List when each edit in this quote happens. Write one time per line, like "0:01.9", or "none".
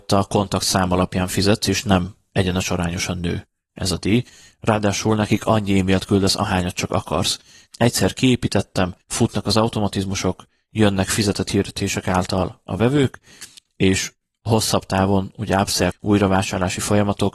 0:07.7
0:09.0
0:15.9

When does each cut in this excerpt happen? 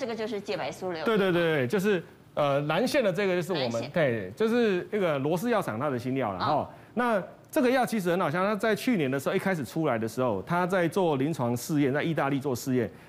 none

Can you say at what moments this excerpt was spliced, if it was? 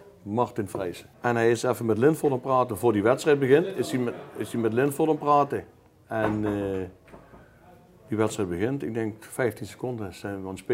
none

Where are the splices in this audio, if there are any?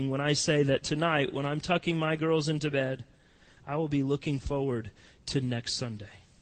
none

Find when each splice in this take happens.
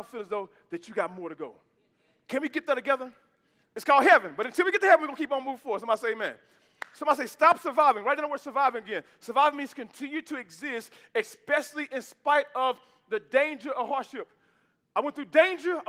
0:03.6

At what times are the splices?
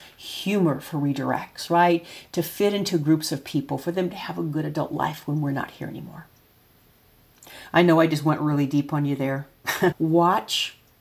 0:09.9

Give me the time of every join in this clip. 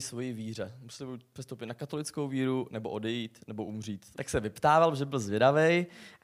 0:04.1

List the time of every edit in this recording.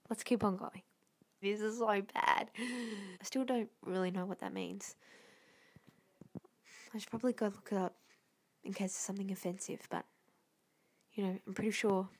0:01.4
0:03.1

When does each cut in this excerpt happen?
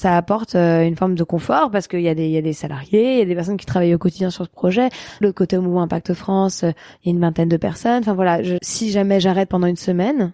0:05.2
0:08.6

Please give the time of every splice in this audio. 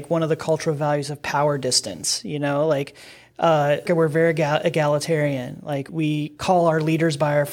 0:03.9
0:05.9

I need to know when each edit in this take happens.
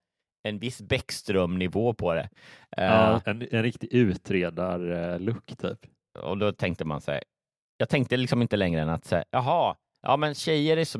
0:06.1

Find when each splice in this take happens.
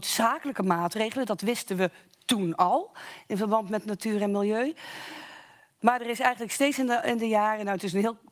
none

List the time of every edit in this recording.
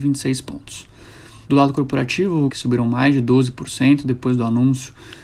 0:01.4
0:02.5

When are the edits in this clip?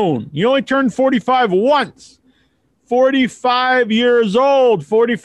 none

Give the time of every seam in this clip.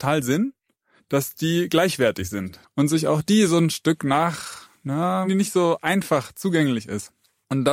0:02.6
0:05.3

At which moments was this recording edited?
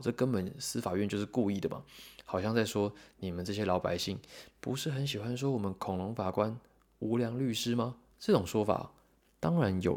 0:08.1

